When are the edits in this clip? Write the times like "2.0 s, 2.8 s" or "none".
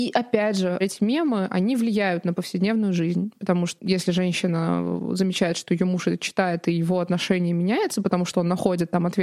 3.8 s